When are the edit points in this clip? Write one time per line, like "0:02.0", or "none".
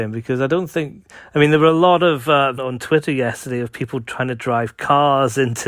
0:02.6